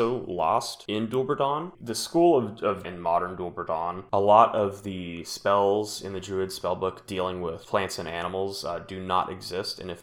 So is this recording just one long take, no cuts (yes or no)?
no